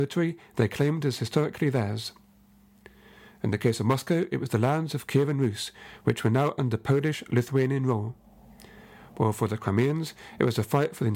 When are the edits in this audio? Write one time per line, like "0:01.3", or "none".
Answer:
none